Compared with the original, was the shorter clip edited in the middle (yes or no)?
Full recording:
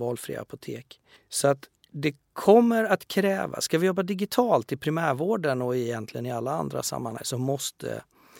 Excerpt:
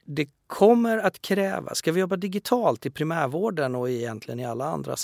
no